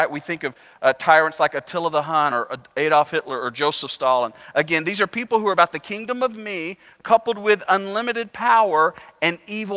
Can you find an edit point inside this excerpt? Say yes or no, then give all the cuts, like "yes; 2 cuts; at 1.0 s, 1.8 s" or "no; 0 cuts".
yes; 1 cut; at 2.3 s